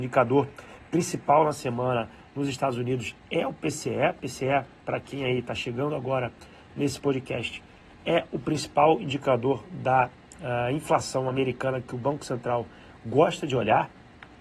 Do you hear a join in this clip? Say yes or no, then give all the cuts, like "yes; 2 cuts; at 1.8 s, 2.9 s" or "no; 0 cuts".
no; 0 cuts